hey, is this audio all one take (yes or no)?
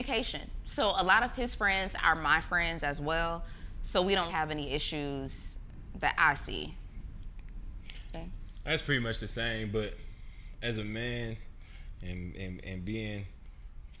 no